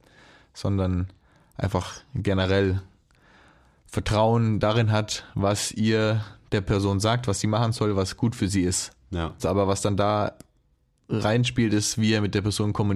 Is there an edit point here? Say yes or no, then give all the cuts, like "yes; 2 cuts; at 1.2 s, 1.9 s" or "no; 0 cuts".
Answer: yes; 1 cut; at 9.4 s